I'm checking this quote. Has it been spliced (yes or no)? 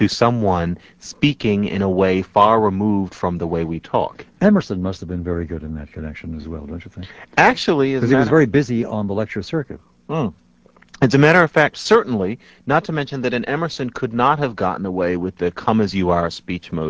no